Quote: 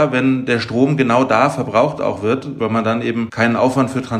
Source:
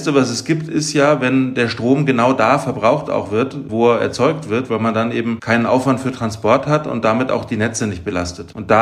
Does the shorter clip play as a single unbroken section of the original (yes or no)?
no